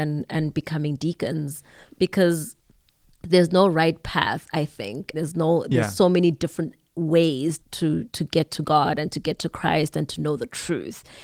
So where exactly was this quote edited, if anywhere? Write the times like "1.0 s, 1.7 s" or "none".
5.1 s, 7.6 s